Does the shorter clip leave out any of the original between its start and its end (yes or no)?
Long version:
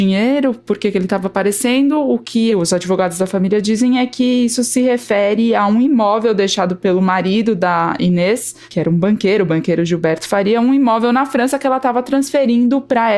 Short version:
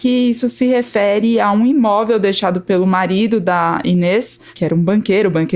no